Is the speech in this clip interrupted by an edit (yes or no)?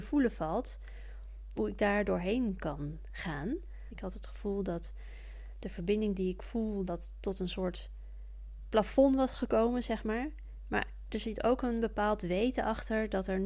yes